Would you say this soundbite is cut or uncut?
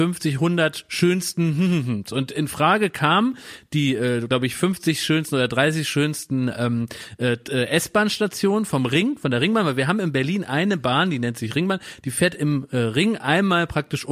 uncut